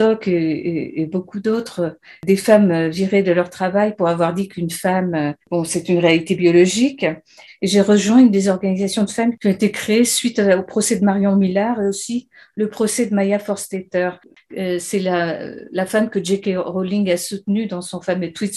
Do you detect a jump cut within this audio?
yes; 2 cuts; at 5.4 s, 7.5 s

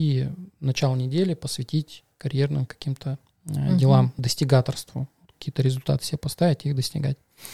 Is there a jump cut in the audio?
no; 0 cuts

